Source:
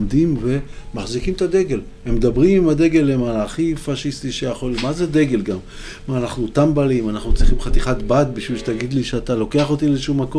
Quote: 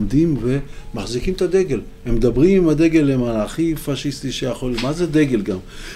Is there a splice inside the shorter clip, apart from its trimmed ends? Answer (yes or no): no